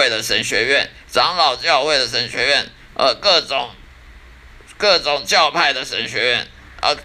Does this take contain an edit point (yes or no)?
no